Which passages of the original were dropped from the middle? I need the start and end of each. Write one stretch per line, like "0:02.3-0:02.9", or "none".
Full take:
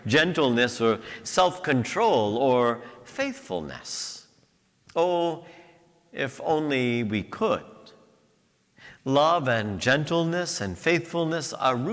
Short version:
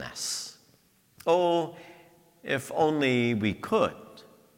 none